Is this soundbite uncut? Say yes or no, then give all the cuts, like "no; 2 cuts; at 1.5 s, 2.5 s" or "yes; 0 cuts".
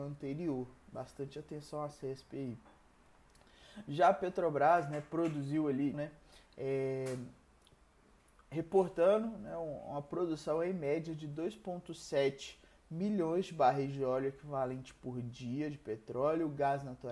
no; 1 cut; at 5.9 s